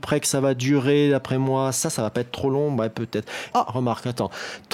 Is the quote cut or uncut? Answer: cut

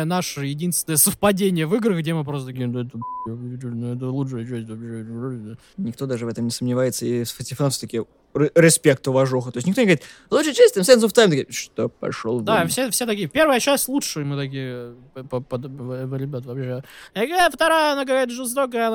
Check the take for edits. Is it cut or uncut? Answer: uncut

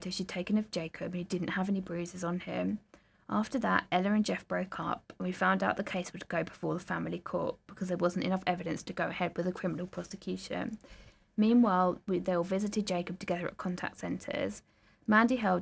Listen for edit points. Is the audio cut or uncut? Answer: uncut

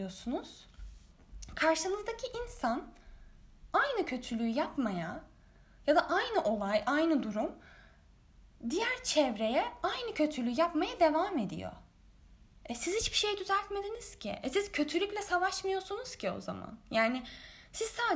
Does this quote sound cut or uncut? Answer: uncut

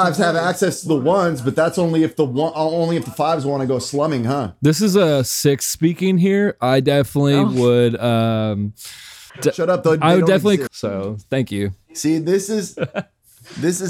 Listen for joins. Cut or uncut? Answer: cut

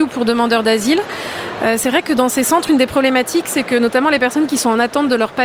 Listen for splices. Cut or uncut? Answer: uncut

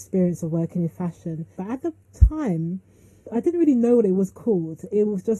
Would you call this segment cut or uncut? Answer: cut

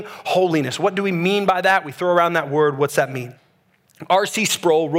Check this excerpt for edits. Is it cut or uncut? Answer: uncut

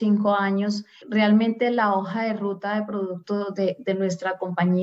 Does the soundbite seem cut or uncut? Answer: cut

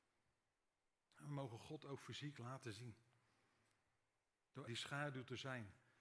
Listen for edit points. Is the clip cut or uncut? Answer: cut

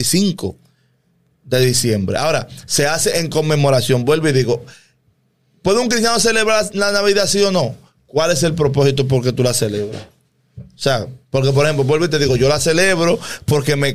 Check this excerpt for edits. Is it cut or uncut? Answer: uncut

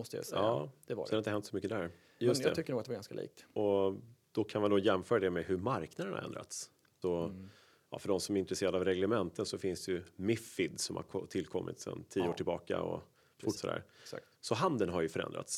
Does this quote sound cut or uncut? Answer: cut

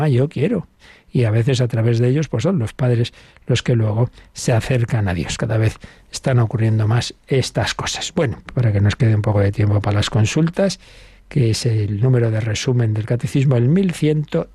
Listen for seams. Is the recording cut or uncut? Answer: cut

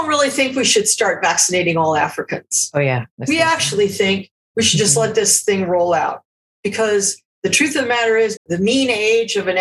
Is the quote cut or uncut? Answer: cut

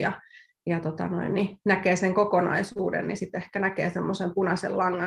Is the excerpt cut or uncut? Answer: uncut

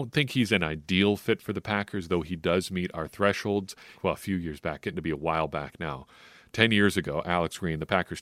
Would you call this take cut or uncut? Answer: cut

